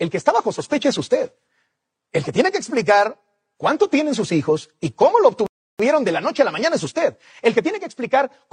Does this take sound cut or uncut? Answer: uncut